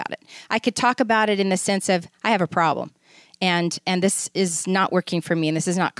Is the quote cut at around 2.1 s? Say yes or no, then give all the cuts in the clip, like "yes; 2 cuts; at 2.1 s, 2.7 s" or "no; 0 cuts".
no; 1 cut; at 3.8 s